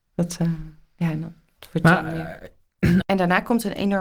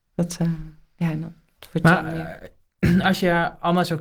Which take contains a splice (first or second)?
first